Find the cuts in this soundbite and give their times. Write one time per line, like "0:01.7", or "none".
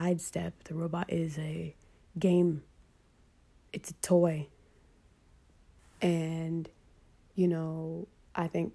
0:05.8